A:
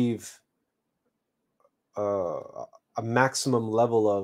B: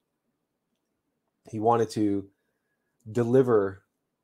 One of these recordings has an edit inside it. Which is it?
B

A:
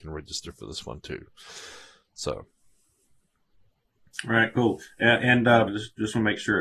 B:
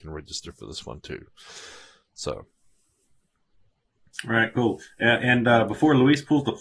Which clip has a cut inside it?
A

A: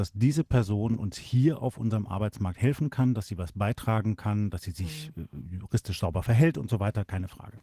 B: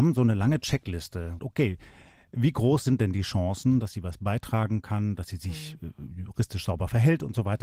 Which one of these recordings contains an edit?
B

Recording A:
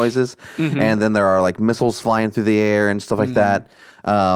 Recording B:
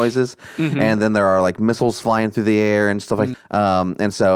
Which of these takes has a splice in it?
B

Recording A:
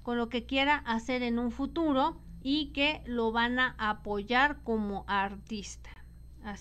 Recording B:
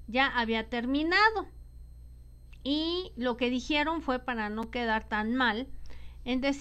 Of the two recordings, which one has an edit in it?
A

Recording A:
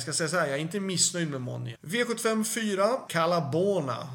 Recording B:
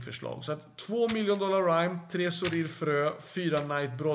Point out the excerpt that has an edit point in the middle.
A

